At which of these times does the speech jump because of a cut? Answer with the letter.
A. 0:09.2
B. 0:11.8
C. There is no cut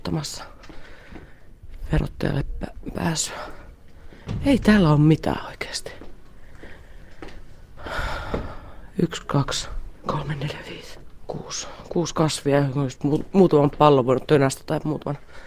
C